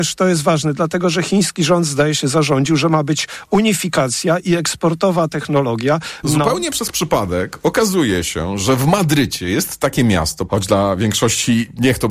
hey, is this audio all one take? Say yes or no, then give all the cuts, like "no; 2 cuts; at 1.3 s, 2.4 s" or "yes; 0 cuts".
no; 2 cuts; at 6.2 s, 10.5 s